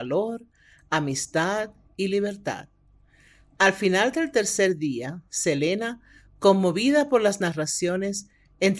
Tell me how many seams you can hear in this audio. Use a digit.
0